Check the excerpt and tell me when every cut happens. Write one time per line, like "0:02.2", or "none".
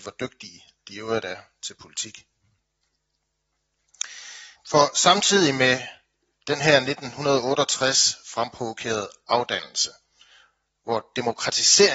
0:04.5